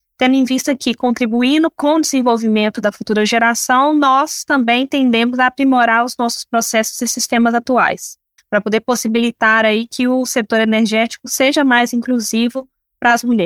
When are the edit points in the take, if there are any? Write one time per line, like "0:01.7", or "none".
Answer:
0:08.4